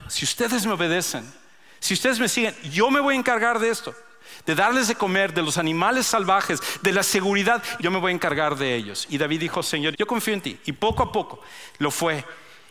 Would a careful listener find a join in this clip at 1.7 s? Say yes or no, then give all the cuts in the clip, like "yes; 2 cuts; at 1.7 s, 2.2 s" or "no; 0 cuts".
no; 2 cuts; at 7.8 s, 9.9 s